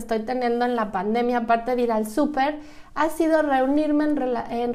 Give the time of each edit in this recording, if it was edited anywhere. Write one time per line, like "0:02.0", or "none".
none